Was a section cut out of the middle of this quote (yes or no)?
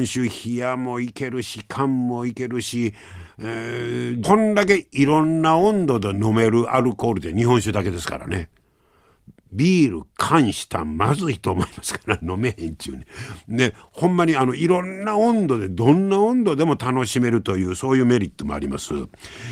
yes